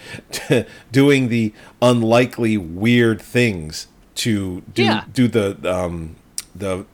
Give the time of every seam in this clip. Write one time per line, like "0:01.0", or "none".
none